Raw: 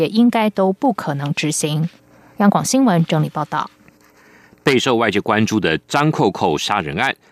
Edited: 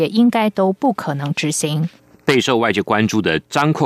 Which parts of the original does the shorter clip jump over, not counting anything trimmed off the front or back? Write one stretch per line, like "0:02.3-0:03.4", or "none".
0:02.1-0:04.5